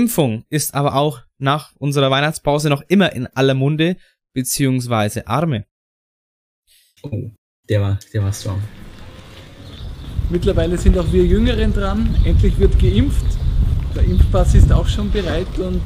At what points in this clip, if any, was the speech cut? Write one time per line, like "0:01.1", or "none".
none